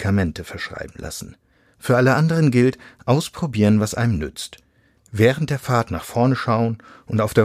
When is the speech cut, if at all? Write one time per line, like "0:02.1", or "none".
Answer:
none